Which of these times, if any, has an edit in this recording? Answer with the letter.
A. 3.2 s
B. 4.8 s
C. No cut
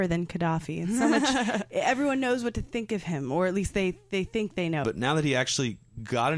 B